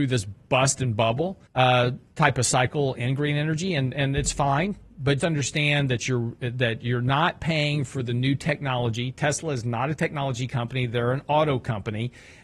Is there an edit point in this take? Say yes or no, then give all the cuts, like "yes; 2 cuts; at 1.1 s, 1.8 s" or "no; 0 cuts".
yes; 2 cuts; at 1.5 s, 5.2 s